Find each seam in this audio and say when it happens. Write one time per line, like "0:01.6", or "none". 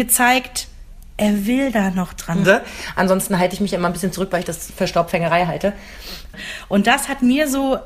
0:02.4
0:06.3